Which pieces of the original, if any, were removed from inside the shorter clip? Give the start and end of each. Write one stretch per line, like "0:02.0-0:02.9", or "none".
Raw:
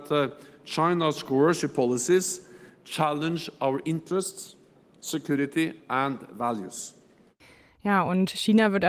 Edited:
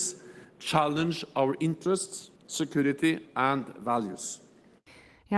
0:04.6-0:04.9